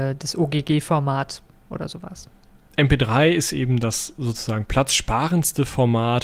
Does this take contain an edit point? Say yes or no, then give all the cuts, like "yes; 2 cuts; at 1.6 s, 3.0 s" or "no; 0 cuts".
no; 0 cuts